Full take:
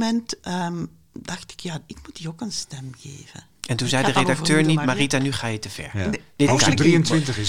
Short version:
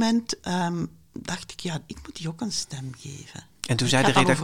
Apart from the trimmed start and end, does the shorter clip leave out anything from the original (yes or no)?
no